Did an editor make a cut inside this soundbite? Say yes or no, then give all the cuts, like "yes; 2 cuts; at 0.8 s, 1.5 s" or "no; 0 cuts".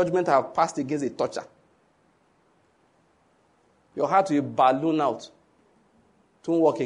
no; 0 cuts